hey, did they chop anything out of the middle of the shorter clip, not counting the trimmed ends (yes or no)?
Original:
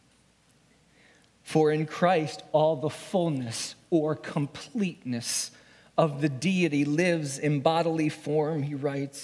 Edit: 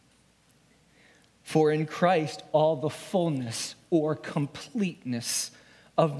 no